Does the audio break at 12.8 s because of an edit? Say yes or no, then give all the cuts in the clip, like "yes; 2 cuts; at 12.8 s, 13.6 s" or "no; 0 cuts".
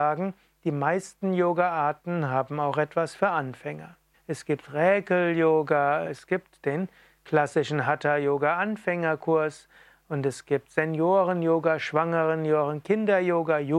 no; 2 cuts; at 4.1 s, 6.0 s